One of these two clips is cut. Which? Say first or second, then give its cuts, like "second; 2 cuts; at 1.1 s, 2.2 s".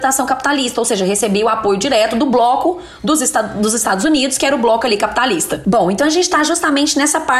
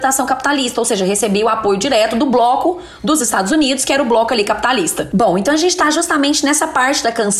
second; 1 cut; at 3.2 s